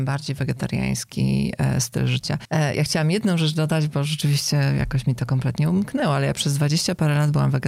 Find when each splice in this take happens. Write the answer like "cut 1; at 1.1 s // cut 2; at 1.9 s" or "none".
none